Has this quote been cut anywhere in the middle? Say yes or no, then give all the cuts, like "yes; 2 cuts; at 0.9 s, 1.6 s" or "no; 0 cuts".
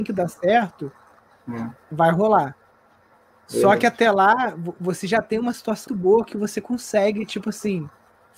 yes; 1 cut; at 5.9 s